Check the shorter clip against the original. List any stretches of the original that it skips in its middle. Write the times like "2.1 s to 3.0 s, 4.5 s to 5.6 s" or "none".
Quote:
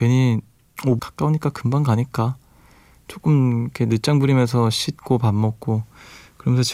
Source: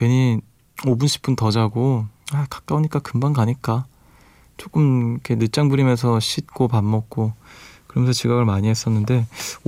1.0 s to 2.5 s

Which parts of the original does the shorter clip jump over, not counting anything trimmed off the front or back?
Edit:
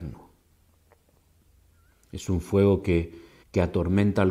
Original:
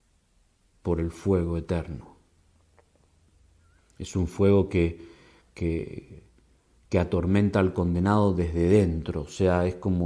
5.3 s to 6.8 s

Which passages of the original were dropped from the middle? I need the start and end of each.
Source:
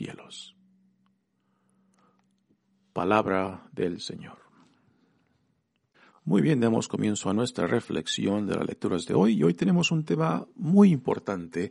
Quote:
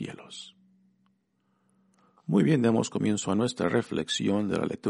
2.2 s to 6.1 s

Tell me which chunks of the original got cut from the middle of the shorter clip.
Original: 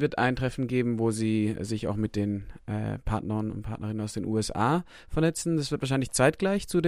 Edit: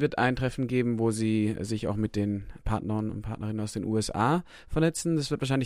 2.6 s to 3.0 s

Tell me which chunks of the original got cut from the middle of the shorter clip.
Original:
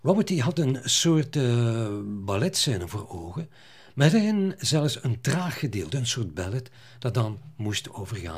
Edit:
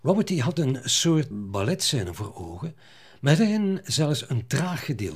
1.3 s to 2.0 s

